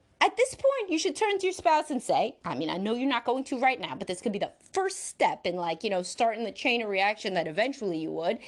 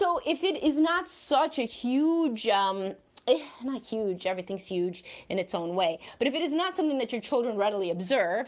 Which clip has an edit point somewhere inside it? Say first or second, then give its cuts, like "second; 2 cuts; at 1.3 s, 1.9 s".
first; 1 cut; at 2.4 s